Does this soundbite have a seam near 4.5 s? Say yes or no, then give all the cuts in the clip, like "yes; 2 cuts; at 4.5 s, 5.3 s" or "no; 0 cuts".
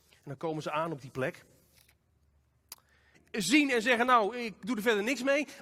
no; 1 cut; at 3.1 s